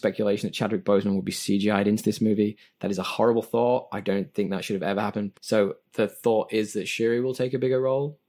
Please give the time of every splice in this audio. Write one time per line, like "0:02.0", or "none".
0:05.3